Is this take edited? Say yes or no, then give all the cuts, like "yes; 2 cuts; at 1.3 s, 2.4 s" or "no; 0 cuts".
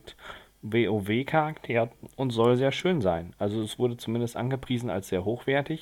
no; 0 cuts